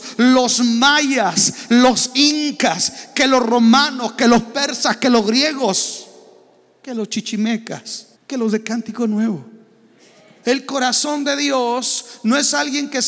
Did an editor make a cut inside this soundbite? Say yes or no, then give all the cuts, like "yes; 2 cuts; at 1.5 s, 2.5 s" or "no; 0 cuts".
yes; 2 cuts; at 8.1 s, 10.4 s